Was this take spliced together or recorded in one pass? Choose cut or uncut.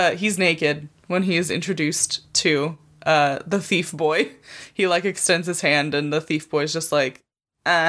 uncut